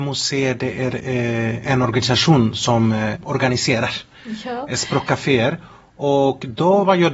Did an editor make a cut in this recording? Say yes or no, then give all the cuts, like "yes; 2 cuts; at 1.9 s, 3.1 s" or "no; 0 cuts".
yes; 1 cut; at 3.1 s